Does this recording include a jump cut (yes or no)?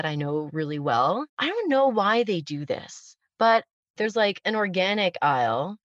yes